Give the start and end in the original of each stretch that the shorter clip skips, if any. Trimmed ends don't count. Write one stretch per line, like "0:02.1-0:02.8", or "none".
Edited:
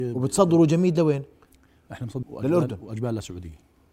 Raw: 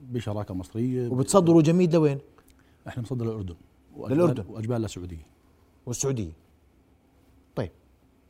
0:03.2-0:03.9